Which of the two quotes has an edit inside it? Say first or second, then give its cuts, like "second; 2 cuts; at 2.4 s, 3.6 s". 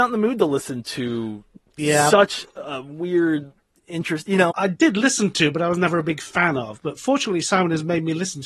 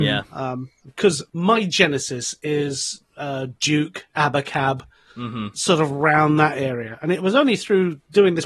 first; 1 cut; at 4.5 s